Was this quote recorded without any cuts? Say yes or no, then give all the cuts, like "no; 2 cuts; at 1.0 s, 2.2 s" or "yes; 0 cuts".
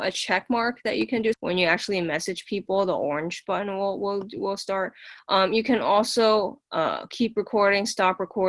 no; 1 cut; at 1.3 s